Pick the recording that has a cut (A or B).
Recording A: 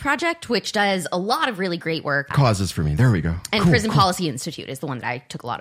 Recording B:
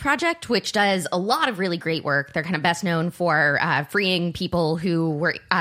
A